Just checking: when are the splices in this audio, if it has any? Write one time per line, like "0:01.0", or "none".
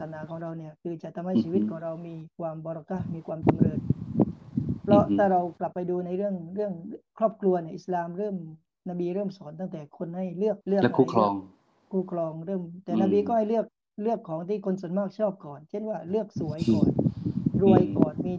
0:10.6